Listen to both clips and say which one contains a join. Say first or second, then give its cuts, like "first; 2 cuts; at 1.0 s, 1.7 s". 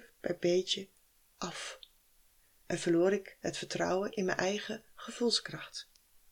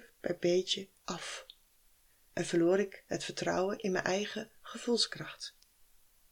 second; 1 cut; at 1.0 s